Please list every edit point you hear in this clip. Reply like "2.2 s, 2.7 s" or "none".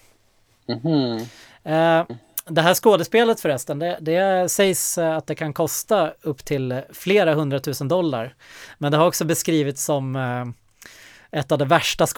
none